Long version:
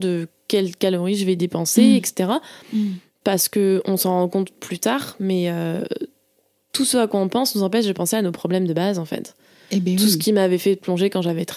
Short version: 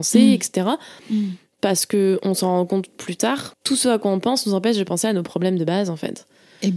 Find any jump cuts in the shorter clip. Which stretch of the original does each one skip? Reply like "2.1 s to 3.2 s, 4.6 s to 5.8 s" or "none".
5.2 s to 6.6 s